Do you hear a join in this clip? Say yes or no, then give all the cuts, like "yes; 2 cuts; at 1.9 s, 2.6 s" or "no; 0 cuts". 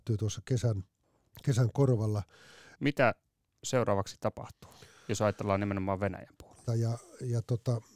yes; 2 cuts; at 2.7 s, 6.7 s